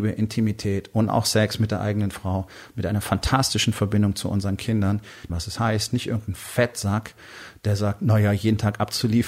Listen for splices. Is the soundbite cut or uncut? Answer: cut